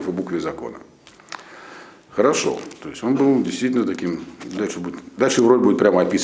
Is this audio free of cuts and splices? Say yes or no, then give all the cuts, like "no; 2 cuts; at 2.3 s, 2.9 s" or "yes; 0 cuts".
yes; 0 cuts